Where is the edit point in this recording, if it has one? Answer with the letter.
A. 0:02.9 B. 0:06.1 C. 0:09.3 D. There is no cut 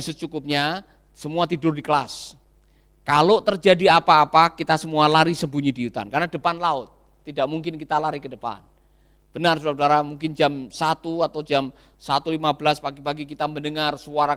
D